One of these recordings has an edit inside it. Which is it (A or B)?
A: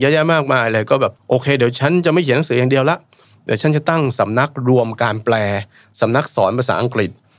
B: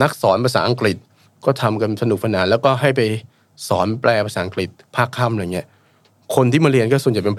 A